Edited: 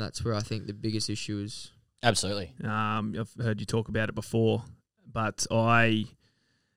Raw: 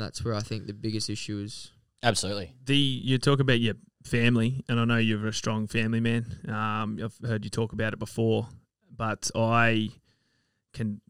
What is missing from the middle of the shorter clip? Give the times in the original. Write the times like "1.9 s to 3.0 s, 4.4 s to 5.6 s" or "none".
2.6 s to 6.4 s